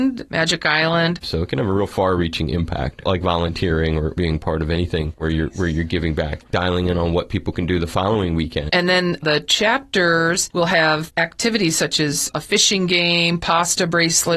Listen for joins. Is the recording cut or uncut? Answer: cut